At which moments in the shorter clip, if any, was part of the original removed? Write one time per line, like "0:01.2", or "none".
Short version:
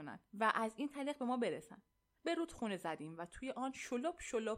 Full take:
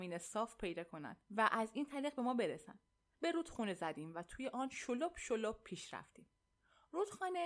none